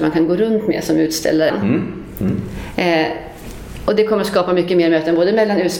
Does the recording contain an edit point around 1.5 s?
yes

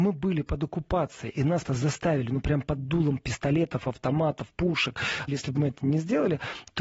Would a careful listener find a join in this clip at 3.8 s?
no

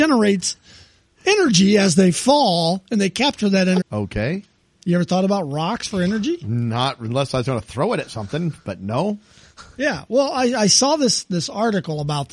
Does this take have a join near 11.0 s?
no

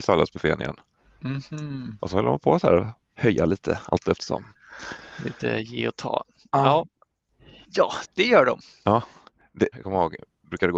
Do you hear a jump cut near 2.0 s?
no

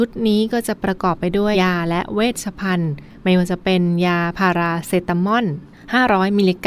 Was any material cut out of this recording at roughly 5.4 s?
no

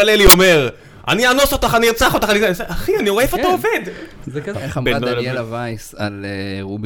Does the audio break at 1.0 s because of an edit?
no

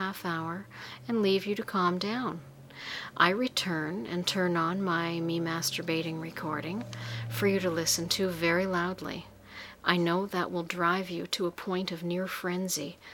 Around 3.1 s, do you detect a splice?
no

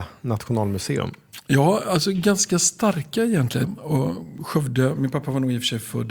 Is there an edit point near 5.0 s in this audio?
yes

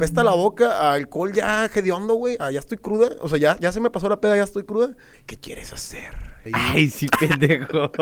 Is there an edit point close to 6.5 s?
yes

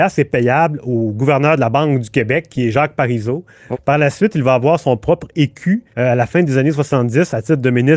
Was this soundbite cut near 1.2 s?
no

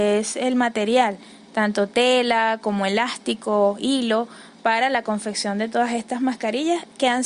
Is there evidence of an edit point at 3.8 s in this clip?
no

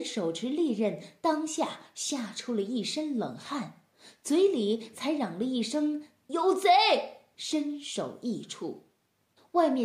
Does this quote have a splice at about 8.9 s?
no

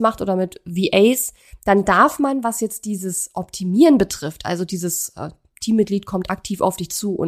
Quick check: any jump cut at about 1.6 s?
no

